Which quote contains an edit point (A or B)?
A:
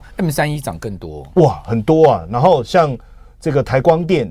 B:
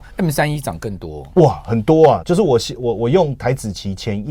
B